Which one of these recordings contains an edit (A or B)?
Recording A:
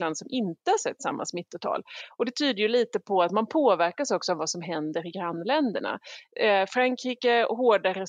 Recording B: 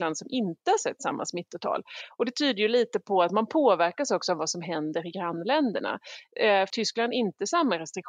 B